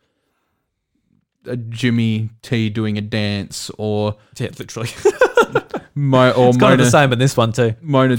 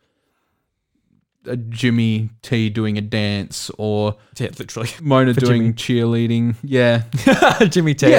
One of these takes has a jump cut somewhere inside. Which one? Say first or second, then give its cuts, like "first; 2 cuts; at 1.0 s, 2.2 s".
second; 1 cut; at 5.0 s